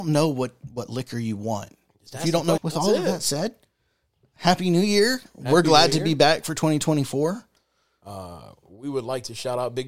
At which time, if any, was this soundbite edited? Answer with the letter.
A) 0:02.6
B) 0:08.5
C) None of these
A